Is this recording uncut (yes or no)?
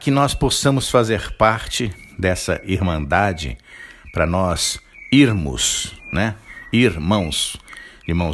yes